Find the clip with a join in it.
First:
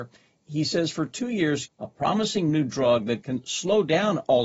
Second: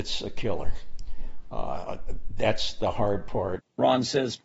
first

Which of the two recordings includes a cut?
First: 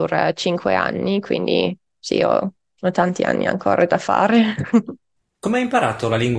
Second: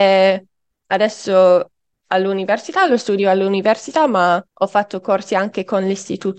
second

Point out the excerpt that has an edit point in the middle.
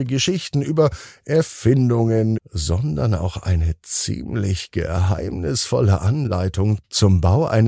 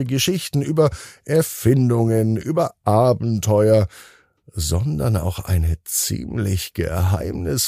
first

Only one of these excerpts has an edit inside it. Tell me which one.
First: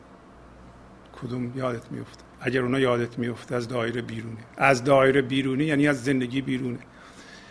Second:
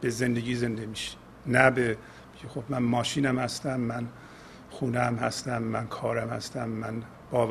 first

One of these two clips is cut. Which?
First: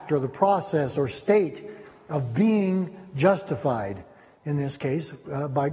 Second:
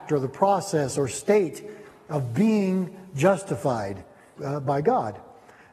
second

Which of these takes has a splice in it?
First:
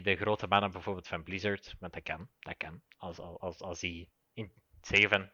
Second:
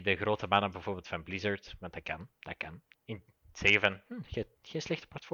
second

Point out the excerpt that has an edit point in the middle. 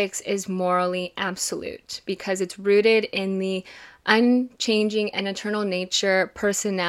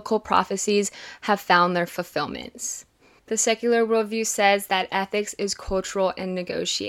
second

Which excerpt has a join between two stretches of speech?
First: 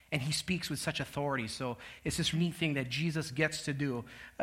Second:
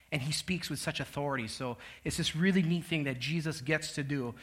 first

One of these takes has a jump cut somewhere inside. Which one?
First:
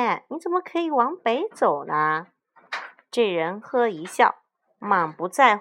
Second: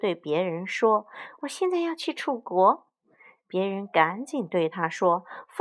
first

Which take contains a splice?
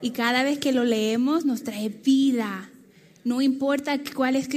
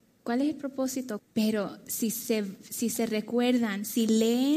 second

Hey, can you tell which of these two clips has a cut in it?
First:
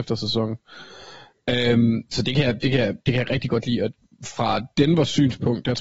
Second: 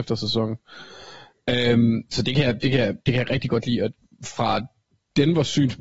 first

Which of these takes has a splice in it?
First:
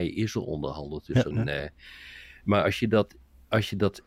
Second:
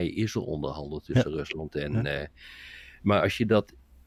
first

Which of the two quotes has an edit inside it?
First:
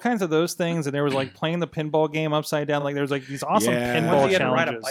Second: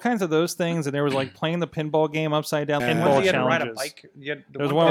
second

